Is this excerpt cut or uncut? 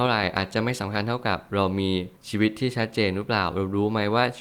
cut